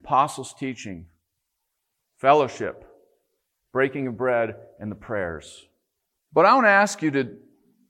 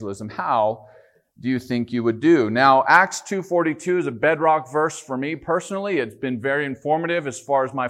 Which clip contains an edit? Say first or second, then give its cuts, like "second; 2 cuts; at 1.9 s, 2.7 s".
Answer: first; 1 cut; at 6.2 s